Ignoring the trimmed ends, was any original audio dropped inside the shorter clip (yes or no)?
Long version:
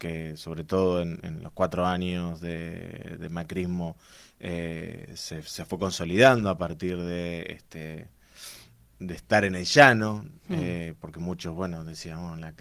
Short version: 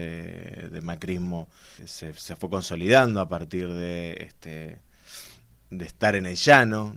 yes